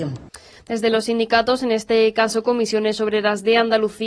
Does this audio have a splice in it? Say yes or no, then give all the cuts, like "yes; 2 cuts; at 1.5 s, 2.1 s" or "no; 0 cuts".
no; 0 cuts